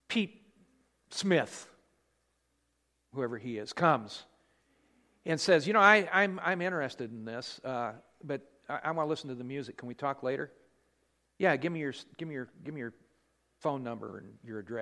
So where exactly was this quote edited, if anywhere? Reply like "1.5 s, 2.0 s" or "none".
none